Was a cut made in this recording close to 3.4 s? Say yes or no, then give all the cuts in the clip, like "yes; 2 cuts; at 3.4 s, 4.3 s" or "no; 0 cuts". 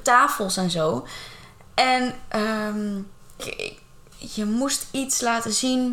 yes; 1 cut; at 3.4 s